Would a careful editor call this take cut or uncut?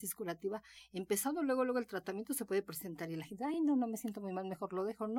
uncut